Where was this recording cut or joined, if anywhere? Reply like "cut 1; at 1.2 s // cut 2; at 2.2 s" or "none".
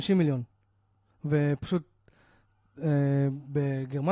none